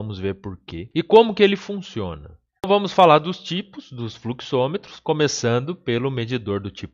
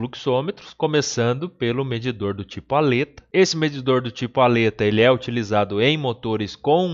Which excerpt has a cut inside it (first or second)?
first